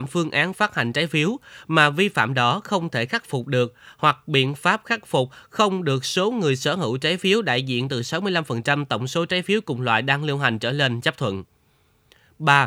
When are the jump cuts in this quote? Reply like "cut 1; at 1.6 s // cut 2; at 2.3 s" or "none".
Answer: none